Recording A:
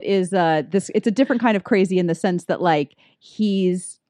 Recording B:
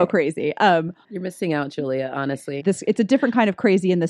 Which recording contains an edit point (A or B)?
B